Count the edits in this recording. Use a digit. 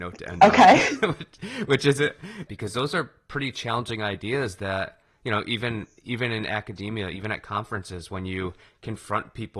1